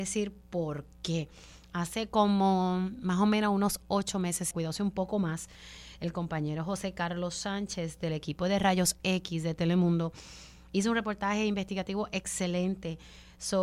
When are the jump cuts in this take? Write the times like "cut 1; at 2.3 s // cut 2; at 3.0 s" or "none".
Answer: cut 1; at 4.5 s